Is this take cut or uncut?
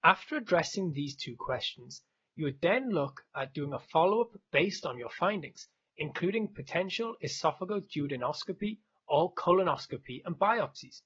uncut